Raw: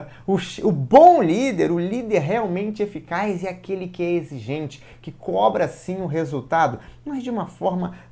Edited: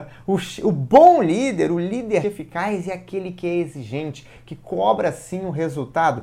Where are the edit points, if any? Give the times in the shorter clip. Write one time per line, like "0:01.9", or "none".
0:02.2